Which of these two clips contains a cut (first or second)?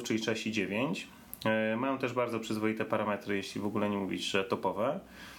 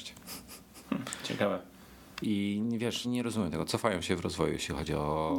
second